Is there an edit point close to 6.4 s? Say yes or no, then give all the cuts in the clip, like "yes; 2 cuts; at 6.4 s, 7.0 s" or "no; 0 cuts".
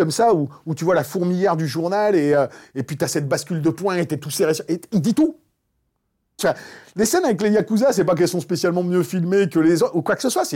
yes; 1 cut; at 6.4 s